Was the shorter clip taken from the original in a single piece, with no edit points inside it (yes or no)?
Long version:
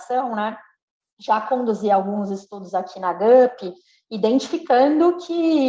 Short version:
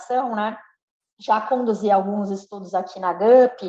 yes